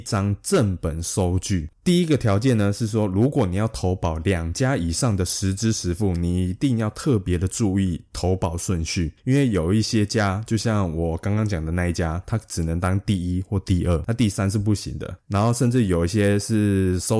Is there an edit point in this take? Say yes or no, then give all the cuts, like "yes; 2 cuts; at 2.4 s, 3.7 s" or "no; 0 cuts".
no; 0 cuts